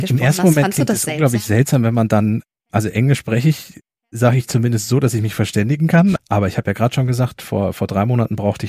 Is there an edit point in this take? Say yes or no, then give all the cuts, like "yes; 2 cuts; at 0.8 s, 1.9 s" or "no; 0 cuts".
yes; 1 cut; at 6.2 s